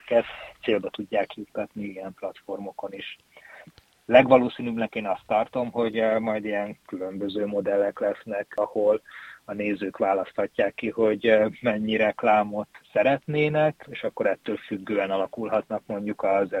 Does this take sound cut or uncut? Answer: cut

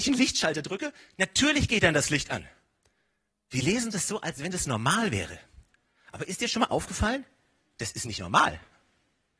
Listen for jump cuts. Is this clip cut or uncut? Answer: cut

